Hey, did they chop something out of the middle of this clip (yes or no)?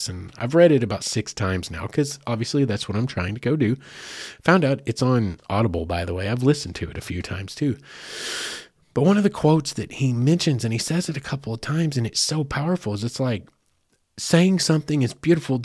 no